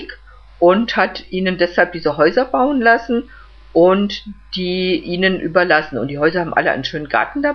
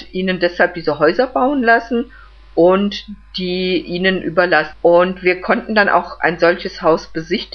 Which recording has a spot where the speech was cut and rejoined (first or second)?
second